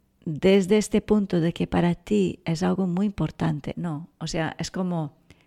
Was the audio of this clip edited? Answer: yes; 1 cut; at 3.7 s

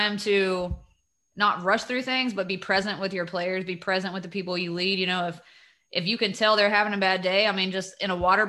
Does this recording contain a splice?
no; 0 cuts

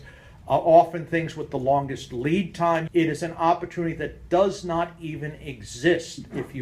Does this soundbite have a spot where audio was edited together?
yes; 1 cut; at 2.9 s

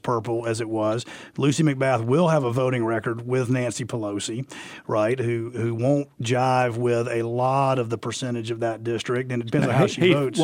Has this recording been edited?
no; 0 cuts

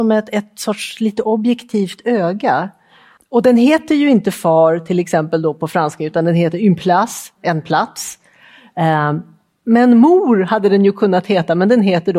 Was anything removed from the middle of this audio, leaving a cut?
yes; 1 cut; at 3.2 s

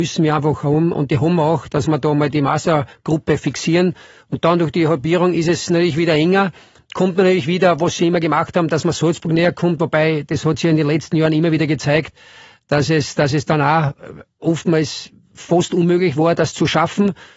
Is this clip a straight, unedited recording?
yes; 0 cuts

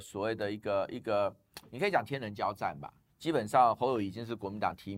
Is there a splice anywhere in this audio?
yes; 1 cut; at 3.1 s

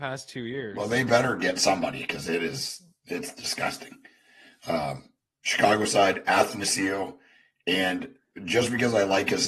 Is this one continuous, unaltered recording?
yes; 0 cuts

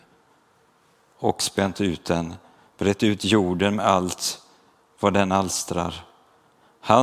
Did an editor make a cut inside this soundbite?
no; 0 cuts

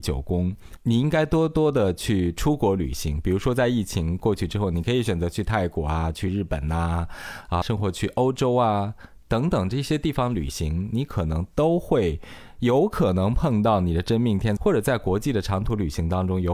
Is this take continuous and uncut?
no; 2 cuts; at 7.6 s, 14.6 s

